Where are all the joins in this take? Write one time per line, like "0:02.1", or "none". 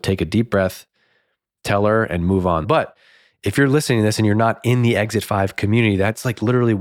0:02.6